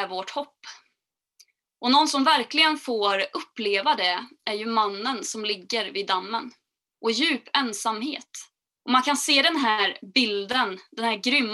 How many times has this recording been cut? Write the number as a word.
two